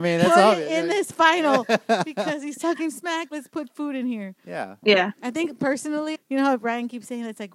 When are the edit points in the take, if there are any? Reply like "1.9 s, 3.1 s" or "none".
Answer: 4.8 s, 6.1 s